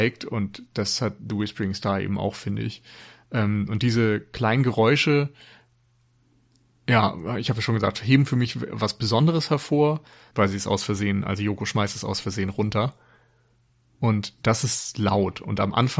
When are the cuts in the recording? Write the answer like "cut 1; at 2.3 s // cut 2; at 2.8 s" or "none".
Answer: cut 1; at 10.3 s